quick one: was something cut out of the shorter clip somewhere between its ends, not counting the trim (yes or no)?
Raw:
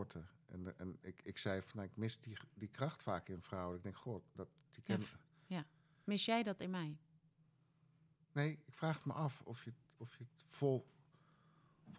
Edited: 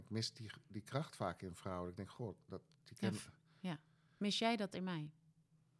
no